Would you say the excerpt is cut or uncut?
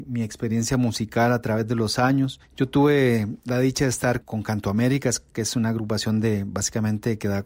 cut